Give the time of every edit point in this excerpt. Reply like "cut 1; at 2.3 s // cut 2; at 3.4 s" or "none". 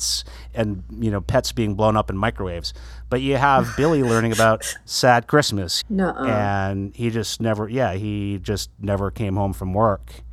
cut 1; at 5.8 s